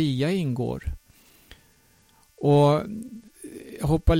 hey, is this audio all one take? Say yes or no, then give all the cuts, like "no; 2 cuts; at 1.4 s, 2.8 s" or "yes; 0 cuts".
yes; 0 cuts